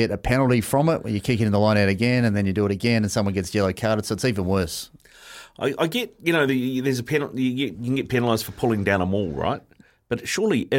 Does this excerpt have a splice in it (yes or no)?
no